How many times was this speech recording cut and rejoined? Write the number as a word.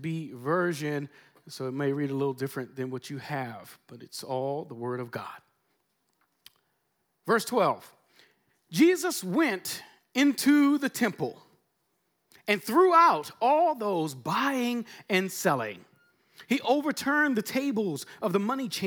zero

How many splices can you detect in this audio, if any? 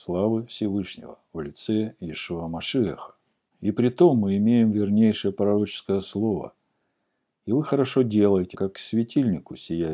two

